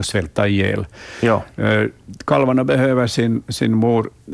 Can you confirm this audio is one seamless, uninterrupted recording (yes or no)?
yes